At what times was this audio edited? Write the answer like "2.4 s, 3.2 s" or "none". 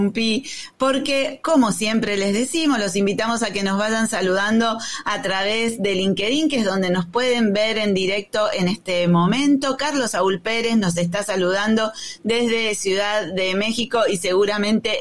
none